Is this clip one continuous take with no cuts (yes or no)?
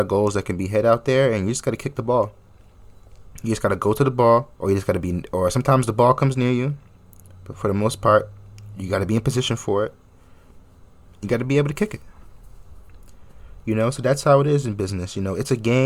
no